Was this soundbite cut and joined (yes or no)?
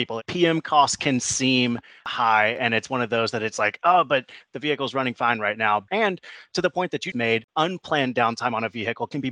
yes